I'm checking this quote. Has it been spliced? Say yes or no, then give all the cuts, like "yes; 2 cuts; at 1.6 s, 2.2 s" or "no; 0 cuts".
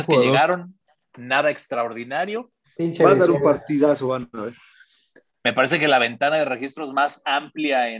yes; 2 cuts; at 2.6 s, 5.3 s